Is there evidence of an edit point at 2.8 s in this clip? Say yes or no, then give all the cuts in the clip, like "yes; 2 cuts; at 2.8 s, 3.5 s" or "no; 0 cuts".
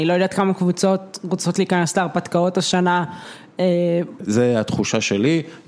no; 1 cut; at 4.2 s